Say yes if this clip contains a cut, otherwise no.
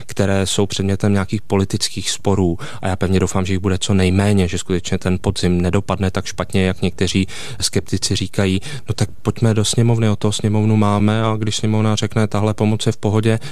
no